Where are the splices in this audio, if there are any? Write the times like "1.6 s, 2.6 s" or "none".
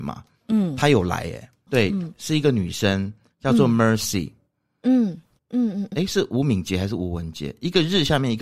1.7 s, 5.9 s